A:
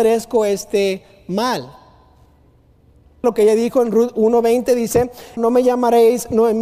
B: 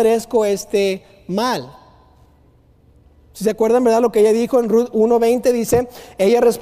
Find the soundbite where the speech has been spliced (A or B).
A